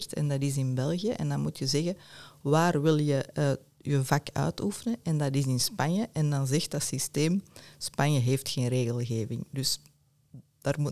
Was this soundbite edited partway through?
no; 0 cuts

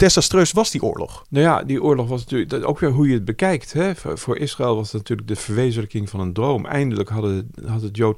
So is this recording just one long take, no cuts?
yes; 0 cuts

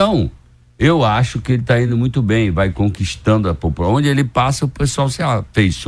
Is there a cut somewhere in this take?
no; 0 cuts

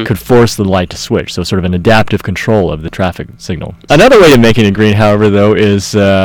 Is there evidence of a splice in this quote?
yes; 1 cut; at 3.9 s

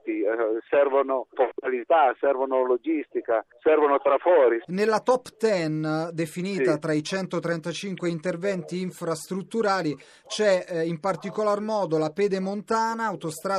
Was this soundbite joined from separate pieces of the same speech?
yes; 1 cut; at 1.3 s

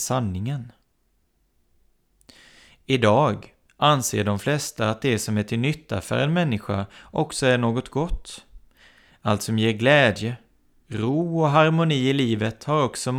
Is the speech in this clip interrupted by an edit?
no; 0 cuts

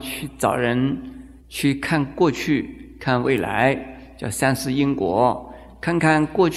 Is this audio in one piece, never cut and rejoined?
yes; 0 cuts

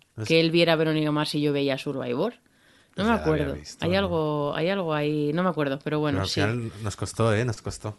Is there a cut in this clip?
no; 0 cuts

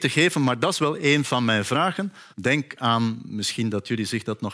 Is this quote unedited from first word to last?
no; 1 cut; at 2.3 s

